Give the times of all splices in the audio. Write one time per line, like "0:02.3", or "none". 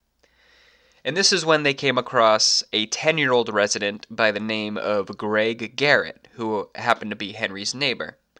none

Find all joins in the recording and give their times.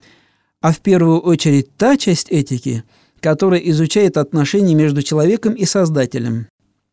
none

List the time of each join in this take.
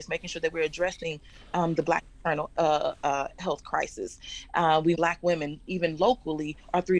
0:05.0

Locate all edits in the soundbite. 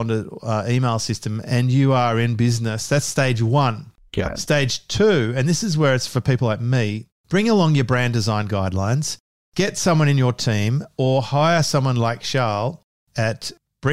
0:07.2

